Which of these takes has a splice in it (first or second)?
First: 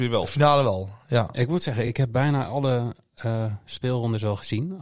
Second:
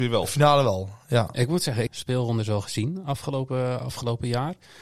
second